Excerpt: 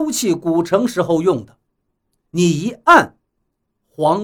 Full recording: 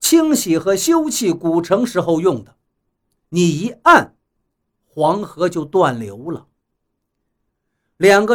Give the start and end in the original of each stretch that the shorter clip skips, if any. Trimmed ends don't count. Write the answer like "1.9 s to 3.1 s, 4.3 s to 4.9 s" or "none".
none